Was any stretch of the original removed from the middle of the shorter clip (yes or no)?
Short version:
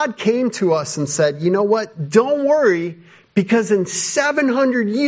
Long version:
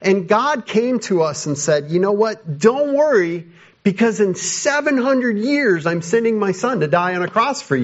no